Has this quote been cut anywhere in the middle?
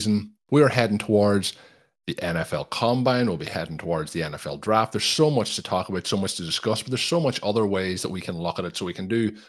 no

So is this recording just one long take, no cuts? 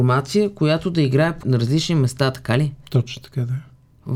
no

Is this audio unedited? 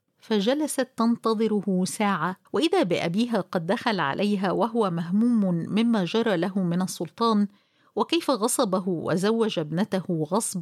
no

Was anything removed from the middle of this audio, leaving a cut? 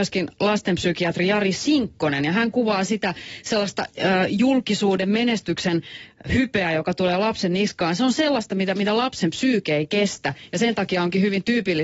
no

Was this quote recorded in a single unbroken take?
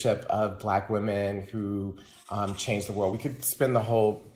yes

